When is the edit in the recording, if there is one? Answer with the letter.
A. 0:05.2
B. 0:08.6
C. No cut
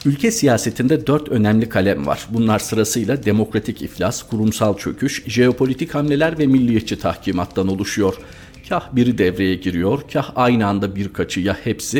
A